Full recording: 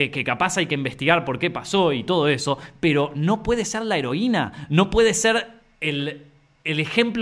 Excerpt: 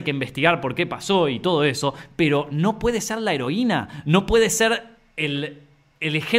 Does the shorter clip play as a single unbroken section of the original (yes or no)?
yes